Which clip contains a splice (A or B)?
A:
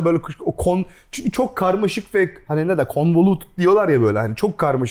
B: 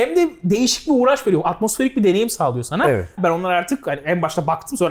B